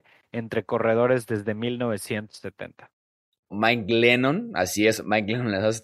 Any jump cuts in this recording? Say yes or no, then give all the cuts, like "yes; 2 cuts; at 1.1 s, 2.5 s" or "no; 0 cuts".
yes; 1 cut; at 3.5 s